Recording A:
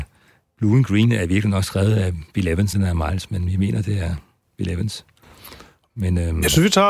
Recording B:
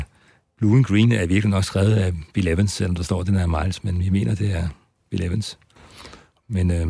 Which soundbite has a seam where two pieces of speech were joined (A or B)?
A